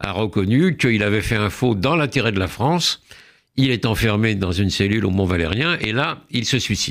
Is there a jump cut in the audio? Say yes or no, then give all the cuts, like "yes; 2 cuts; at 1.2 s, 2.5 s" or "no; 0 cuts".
no; 0 cuts